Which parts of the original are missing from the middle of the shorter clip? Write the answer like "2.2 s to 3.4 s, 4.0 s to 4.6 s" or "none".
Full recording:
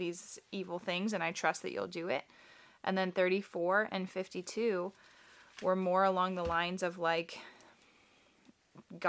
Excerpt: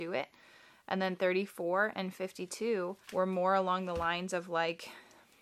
5.0 s to 5.5 s